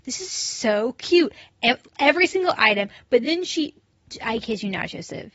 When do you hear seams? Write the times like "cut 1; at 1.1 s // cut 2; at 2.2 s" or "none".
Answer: none